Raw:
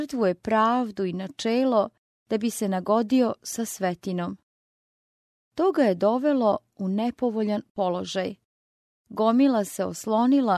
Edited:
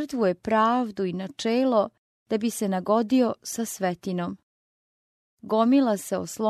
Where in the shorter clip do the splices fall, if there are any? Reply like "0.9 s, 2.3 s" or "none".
5.2 s